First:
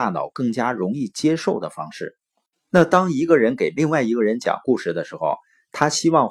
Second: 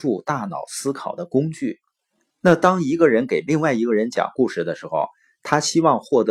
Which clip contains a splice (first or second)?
second